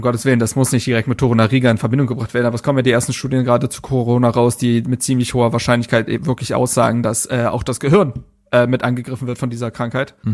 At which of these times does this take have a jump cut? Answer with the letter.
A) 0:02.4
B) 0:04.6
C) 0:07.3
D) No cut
D